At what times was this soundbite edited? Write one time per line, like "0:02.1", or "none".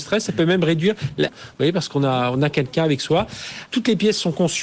0:01.3
0:03.7